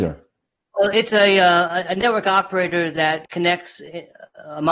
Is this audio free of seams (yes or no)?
yes